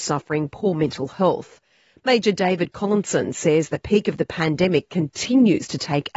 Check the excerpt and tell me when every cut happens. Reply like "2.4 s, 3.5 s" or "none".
none